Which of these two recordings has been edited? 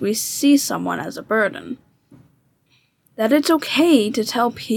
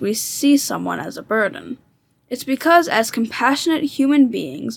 first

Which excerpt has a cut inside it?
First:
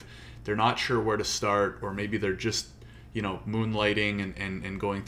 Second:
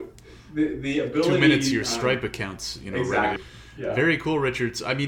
second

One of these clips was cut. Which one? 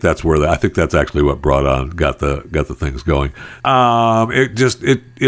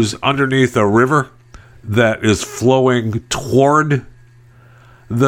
first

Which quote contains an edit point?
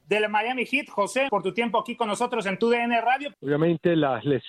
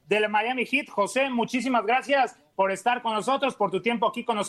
first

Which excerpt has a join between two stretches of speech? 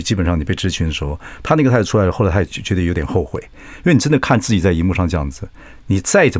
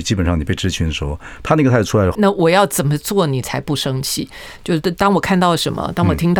second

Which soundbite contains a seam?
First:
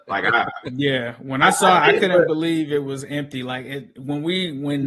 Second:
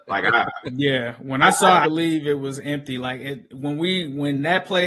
second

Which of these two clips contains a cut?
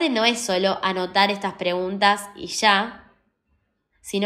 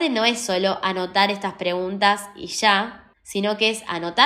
second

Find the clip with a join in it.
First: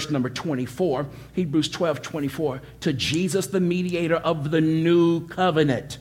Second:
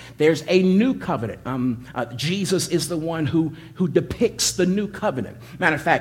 second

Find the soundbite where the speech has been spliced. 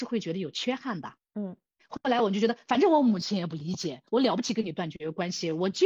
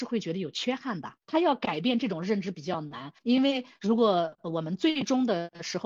second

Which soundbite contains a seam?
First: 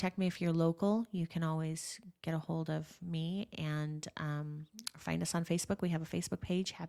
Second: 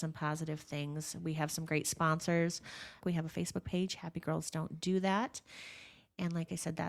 second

